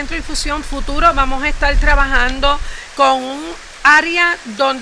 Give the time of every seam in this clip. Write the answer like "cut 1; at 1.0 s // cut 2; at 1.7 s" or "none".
cut 1; at 2.9 s